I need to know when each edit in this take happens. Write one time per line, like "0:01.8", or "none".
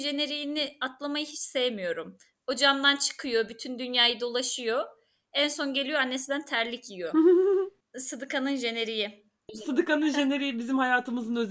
0:09.5